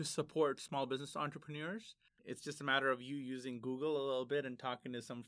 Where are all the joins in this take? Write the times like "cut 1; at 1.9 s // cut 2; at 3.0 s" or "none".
cut 1; at 2.1 s